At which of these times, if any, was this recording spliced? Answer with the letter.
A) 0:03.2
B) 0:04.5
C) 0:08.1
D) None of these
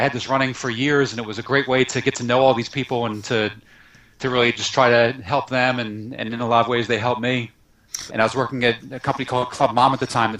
C